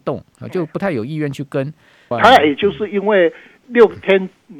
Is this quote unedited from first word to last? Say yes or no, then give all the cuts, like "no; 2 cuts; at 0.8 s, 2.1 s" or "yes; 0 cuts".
no; 2 cuts; at 2.1 s, 3.6 s